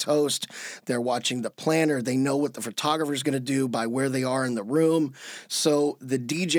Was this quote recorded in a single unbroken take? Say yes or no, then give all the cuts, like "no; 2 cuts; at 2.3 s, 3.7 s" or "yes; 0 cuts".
yes; 0 cuts